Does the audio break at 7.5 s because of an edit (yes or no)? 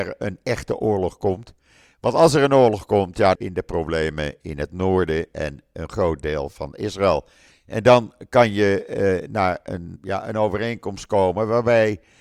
yes